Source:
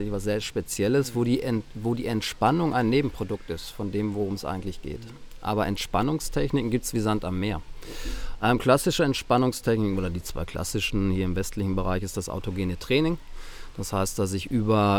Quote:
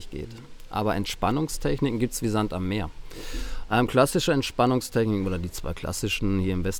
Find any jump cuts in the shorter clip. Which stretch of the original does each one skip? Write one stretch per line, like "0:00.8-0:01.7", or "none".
none